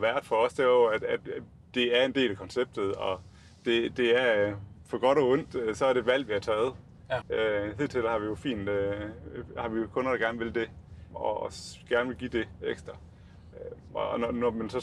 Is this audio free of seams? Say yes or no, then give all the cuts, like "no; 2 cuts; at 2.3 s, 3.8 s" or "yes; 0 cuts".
no; 2 cuts; at 7.2 s, 11.1 s